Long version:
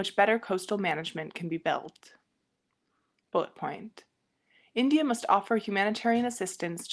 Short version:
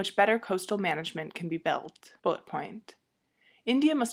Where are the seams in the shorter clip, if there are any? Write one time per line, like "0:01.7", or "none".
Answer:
0:02.2